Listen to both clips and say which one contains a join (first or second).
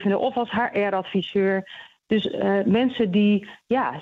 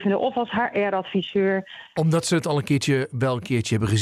second